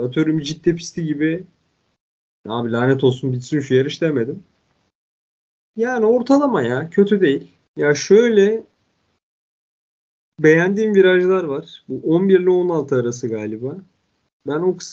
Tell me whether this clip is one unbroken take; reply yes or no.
no